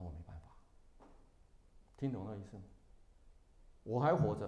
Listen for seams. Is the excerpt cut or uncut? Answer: cut